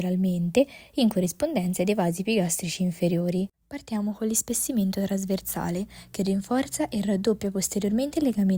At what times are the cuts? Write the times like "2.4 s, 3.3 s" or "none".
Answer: 3.5 s